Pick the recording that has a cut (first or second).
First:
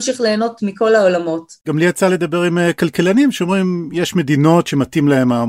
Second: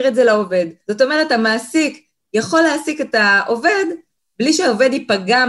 first